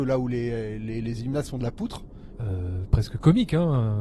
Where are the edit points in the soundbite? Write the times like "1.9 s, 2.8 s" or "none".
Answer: 2.3 s